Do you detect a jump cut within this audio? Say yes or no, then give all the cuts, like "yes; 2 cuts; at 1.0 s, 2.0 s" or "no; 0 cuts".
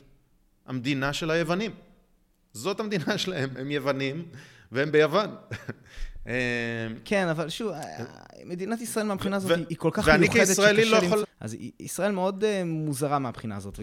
yes; 2 cuts; at 9.7 s, 11.2 s